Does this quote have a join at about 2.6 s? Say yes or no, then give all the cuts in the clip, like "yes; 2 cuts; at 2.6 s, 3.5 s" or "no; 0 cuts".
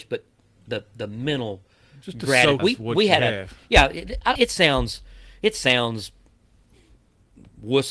yes; 2 cuts; at 2.6 s, 4.4 s